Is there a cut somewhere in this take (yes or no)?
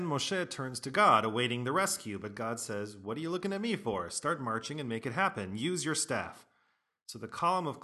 no